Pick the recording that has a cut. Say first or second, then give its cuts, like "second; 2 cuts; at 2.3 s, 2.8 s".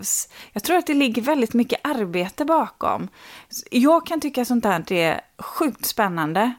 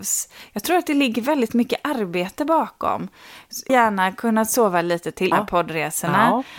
second; 2 cuts; at 3.7 s, 5.3 s